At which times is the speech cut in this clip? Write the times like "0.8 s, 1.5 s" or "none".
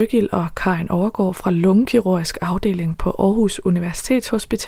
none